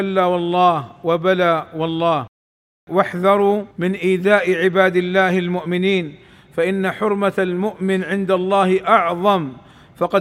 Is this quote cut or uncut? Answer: cut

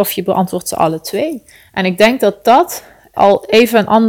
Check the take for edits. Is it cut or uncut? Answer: cut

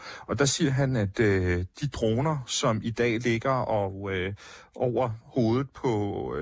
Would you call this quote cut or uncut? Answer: uncut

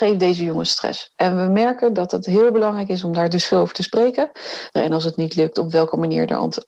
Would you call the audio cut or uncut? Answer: cut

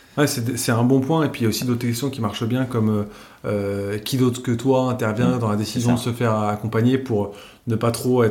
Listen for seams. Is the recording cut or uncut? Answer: uncut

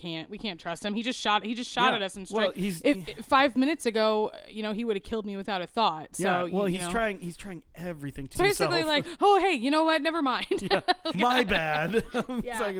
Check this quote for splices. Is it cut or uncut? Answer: cut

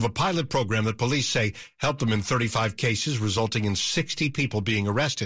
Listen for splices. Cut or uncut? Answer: uncut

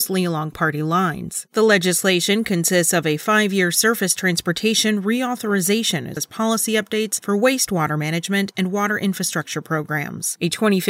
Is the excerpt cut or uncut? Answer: cut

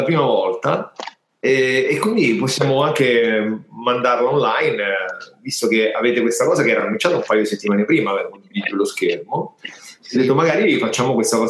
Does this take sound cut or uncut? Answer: uncut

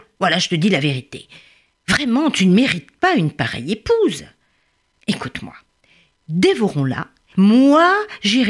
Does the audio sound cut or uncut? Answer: cut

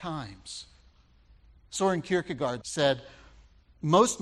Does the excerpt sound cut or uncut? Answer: cut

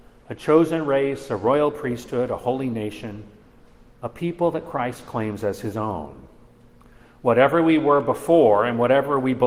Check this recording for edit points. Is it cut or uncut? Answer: uncut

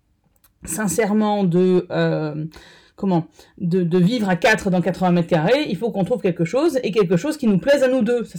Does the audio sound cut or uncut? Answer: uncut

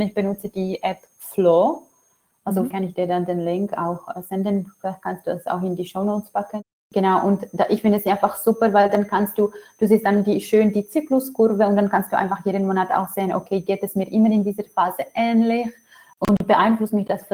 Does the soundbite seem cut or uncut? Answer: uncut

